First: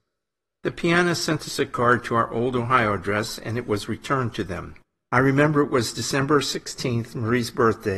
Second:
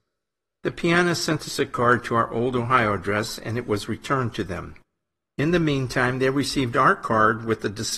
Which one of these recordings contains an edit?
first; 1 cut; at 5.1 s

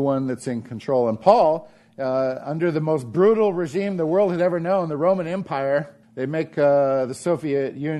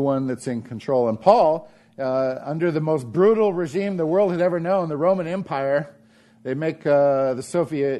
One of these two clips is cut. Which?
first; 1 cut; at 6.0 s

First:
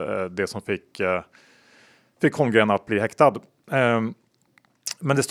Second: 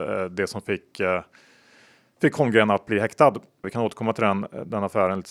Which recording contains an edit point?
second; 1 cut; at 3.6 s

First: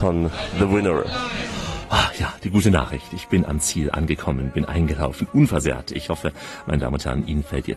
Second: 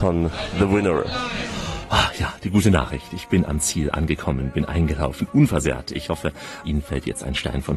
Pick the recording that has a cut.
second; 1 cut; at 6.6 s

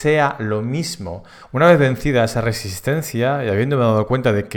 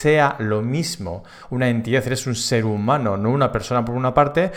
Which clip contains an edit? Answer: first; 1 cut; at 1.5 s

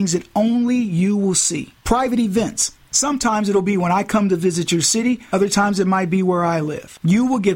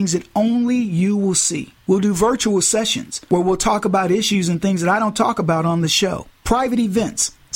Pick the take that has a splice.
first; 1 cut; at 1.8 s

